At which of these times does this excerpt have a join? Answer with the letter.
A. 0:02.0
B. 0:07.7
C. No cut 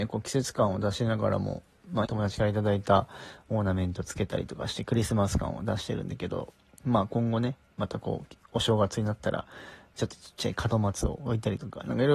A